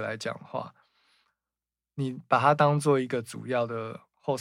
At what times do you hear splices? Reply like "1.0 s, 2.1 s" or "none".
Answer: none